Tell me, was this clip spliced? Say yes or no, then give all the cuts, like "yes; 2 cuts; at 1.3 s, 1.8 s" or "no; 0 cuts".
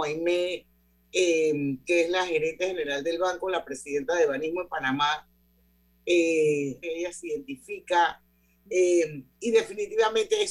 yes; 1 cut; at 6.8 s